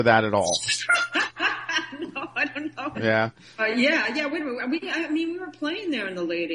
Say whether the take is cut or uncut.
cut